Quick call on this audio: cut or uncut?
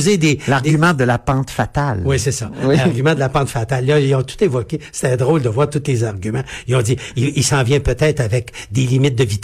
uncut